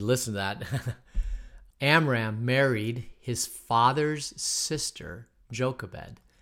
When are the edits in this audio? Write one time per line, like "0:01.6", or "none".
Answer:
0:01.7